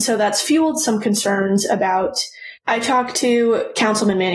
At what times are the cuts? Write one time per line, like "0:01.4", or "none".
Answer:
0:02.6